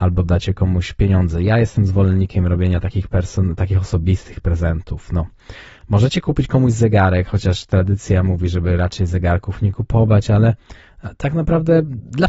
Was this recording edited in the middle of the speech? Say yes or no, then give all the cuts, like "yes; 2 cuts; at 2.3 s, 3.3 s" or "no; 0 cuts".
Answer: no; 0 cuts